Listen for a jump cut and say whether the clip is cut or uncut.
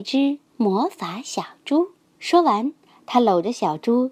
cut